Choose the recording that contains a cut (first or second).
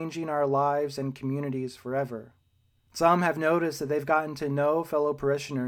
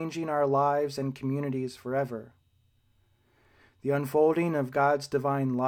first